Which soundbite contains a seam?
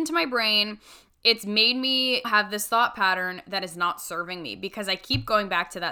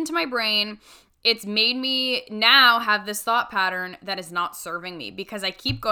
first; 1 cut; at 2.2 s

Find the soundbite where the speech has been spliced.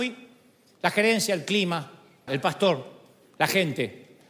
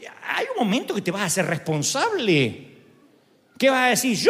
first; 1 cut; at 2.3 s

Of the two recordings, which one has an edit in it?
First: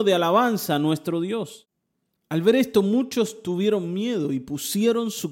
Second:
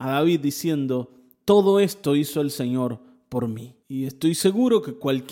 second; 1 cut; at 3.8 s

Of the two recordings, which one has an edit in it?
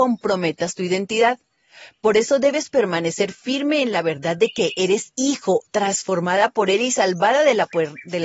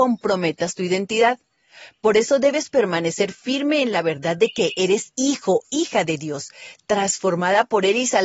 first; 1 cut; at 5.7 s

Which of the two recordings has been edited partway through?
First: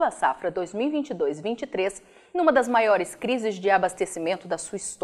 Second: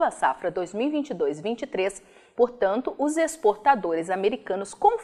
second; 1 cut; at 2.3 s

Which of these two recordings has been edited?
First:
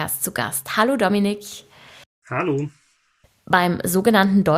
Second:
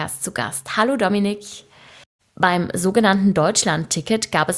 second; 1 cut; at 2.2 s

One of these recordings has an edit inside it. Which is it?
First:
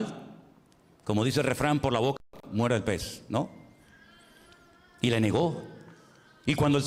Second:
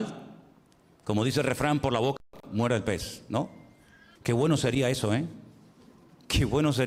second; 1 cut; at 4.2 s

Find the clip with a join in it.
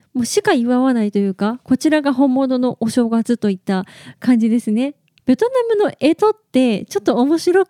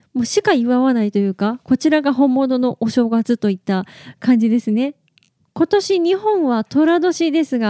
first; 1 cut; at 5.2 s

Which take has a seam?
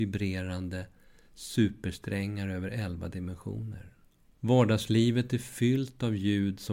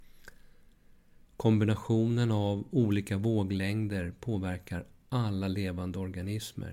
first; 1 cut; at 4.3 s

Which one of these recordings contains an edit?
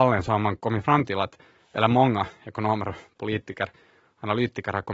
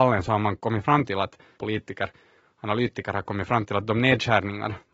second; 1 cut; at 1.5 s

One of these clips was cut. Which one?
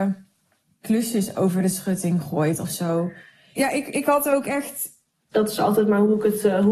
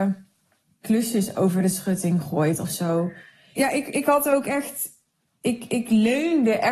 first; 1 cut; at 5.3 s

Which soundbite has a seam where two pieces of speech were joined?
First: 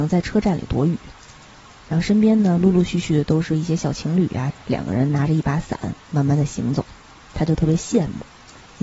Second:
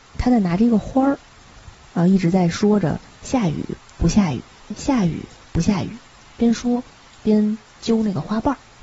first; 1 cut; at 4.5 s

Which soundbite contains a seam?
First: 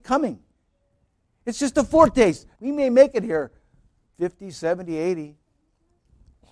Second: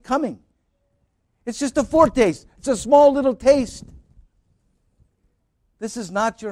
first; 2 cuts; at 2.5 s, 4.5 s

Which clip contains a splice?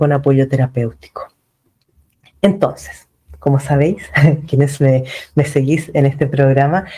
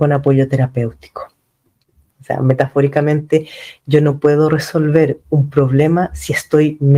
second; 1 cut; at 2.1 s

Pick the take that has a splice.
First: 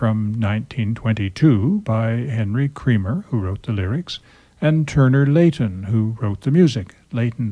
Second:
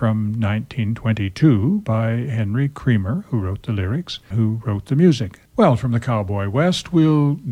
second; 2 cuts; at 4.3 s, 5.5 s

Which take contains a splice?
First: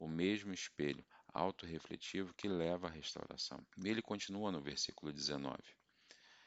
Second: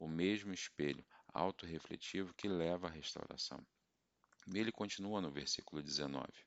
first; 1 cut; at 3.7 s

